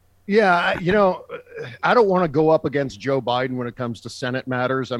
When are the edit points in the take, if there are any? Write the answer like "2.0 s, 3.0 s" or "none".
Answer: 1.8 s